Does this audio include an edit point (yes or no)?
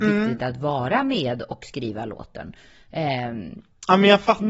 no